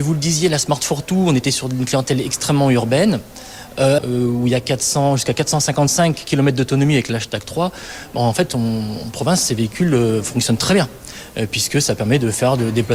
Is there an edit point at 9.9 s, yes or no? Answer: no